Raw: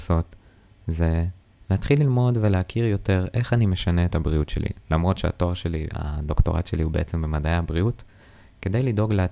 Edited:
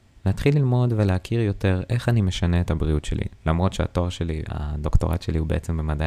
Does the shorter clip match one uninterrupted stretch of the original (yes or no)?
yes